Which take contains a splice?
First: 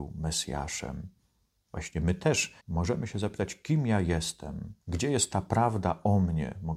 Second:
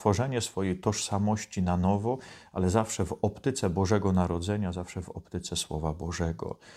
first; 2 cuts; at 2.6 s, 4.8 s

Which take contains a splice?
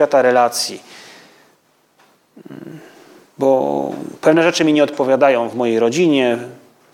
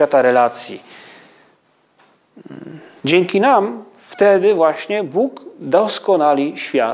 second; 1 cut; at 3.0 s

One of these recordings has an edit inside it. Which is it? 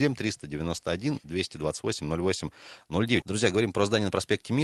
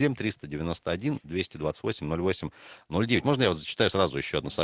first; 1 cut; at 3.2 s

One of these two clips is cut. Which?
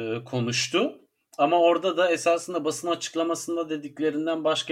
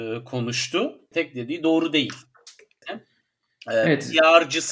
second; 2 cuts; at 1.1 s, 2.8 s

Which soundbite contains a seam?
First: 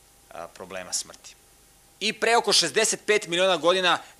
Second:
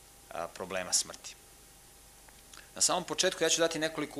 first; 1 cut; at 1.9 s

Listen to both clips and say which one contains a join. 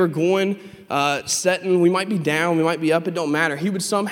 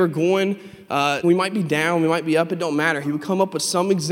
second; 2 cuts; at 1.2 s, 3.0 s

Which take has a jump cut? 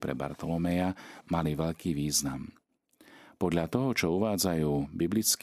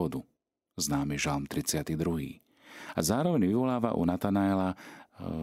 first; 1 cut; at 1.2 s

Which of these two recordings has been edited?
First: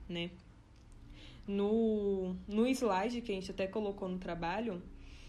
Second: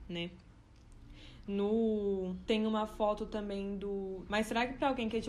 second; 2 cuts; at 2.5 s, 4.3 s

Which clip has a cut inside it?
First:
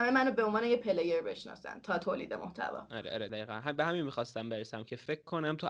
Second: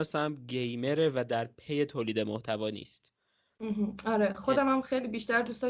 first; 1 cut; at 3.3 s

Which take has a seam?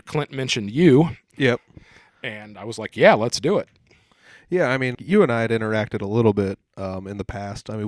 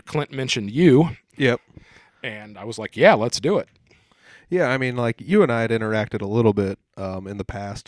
first; 1 cut; at 4.9 s

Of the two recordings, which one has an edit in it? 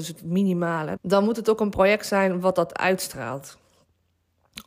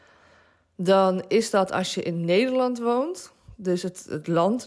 first; 1 cut; at 1.0 s

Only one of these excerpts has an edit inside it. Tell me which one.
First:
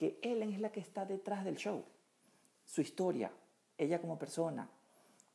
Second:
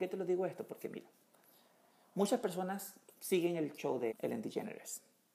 second; 1 cut; at 4.1 s

